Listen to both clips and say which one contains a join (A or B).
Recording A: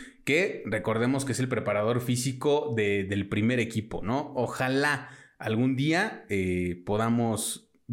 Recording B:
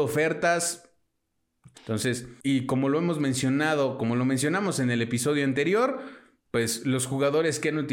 B